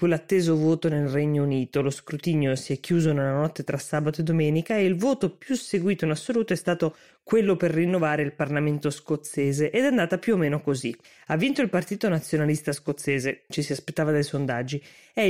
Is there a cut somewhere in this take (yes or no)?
yes